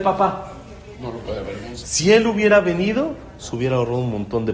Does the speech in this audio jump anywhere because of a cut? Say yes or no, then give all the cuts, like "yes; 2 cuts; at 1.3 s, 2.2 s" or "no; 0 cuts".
yes; 1 cut; at 1.8 s